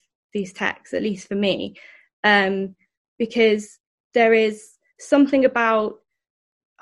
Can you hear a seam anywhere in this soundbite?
no; 0 cuts

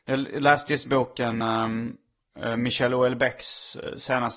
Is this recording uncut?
yes; 0 cuts

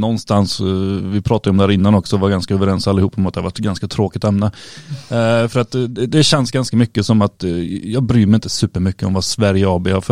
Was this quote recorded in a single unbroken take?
yes; 0 cuts

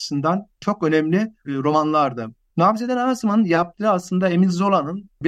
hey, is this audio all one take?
no; 1 cut; at 2.5 s

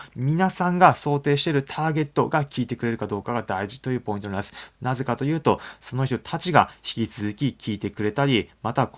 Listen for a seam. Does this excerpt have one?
no; 0 cuts

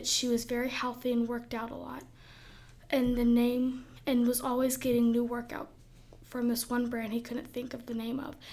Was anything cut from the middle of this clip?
no; 0 cuts

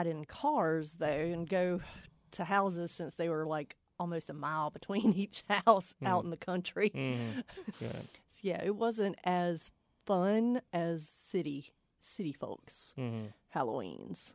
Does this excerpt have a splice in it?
yes; 2 cuts; at 7.7 s, 10.7 s

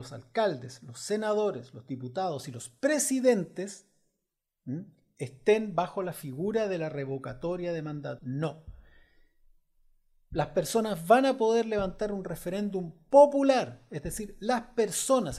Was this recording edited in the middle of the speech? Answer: yes; 1 cut; at 8.2 s

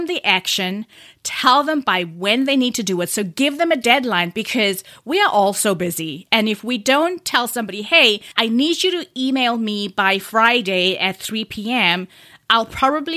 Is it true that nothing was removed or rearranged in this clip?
yes; 0 cuts

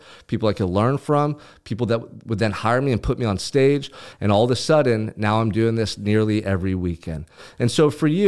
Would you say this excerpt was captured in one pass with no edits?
yes; 0 cuts

